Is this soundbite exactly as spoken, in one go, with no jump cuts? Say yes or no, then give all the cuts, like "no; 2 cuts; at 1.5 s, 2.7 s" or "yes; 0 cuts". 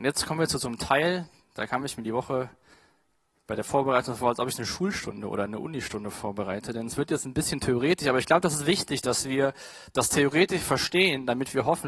yes; 0 cuts